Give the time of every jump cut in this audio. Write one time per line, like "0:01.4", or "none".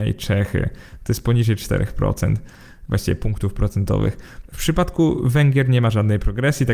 0:04.5